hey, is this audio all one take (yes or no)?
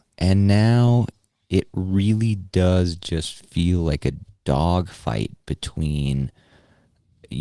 yes